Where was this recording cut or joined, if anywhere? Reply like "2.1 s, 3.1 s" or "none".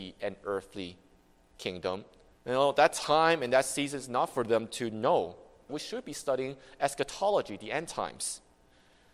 2.4 s, 5.7 s

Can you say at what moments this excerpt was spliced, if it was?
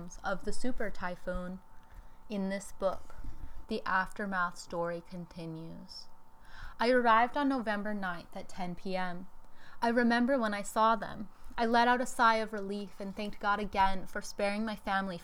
3.6 s

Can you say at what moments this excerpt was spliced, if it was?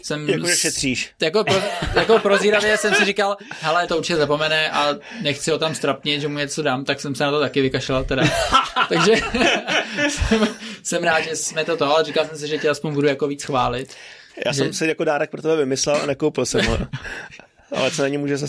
3.9 s

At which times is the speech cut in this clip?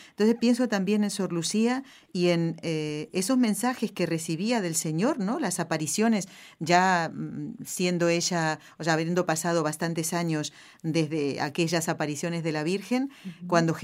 none

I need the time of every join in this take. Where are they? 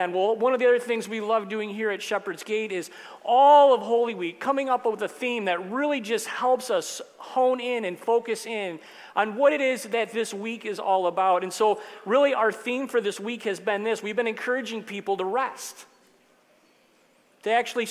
none

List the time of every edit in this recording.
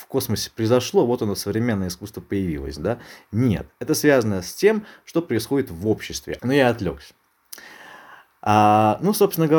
6.4 s

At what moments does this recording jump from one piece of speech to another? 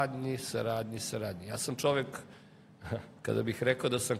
3.2 s

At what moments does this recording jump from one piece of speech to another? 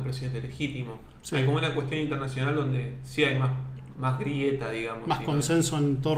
none

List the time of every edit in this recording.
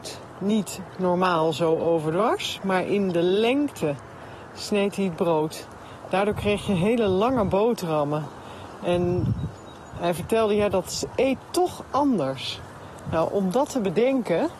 none

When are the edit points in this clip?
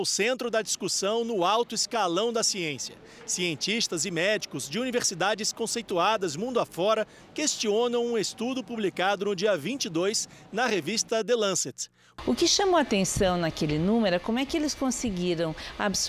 7.2 s, 12.1 s

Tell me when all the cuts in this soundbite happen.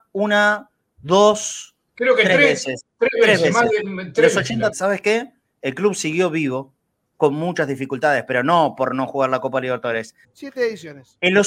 4.7 s, 7.0 s, 10.2 s

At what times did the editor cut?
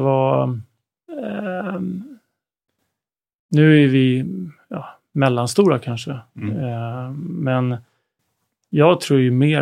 none

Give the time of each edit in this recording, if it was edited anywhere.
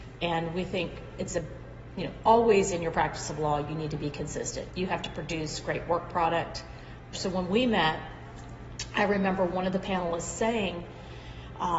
4.7 s, 7.1 s

